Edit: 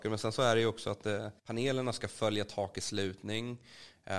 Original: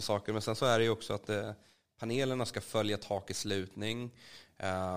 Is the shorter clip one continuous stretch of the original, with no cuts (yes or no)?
no